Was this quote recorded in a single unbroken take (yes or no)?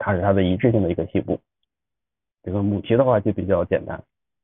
no